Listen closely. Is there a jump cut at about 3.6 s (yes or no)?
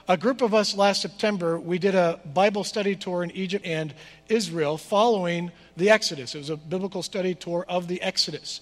yes